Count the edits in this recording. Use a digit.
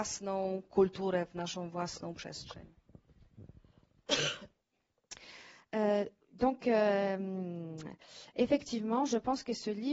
0